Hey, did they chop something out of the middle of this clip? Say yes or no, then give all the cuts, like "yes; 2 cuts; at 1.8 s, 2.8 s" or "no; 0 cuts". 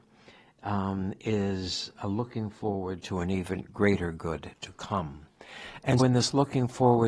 yes; 1 cut; at 6.0 s